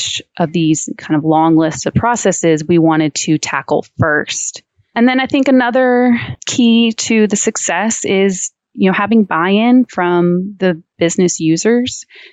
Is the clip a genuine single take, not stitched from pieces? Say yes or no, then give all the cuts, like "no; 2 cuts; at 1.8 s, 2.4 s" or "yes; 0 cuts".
yes; 0 cuts